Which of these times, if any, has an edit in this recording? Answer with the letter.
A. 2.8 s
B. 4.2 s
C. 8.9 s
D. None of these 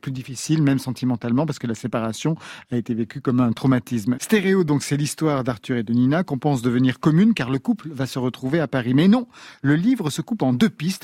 B